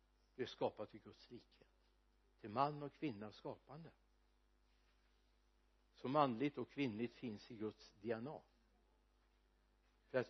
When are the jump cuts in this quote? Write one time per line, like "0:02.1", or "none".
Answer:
none